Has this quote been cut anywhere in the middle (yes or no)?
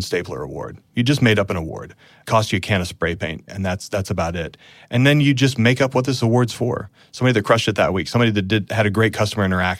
yes